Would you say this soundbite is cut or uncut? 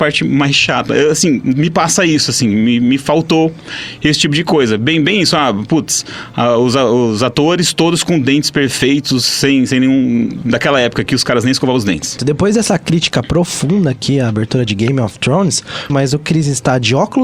cut